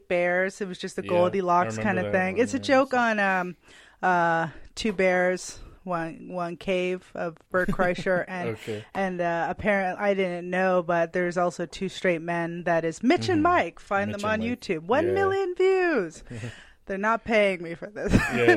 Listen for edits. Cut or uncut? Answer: uncut